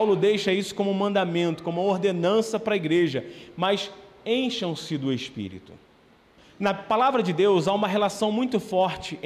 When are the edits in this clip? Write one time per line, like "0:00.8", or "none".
0:06.4